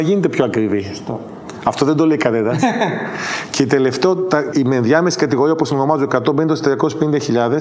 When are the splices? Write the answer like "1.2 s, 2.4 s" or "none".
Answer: 4.5 s